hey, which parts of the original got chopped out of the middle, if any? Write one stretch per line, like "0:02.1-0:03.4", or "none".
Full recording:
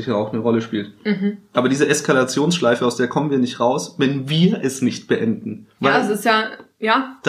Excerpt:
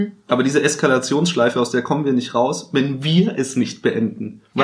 none